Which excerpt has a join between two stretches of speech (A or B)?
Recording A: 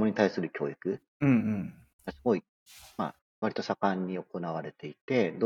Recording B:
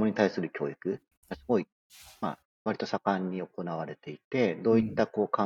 B